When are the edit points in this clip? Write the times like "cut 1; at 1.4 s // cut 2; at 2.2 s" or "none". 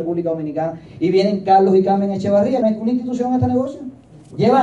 cut 1; at 2.6 s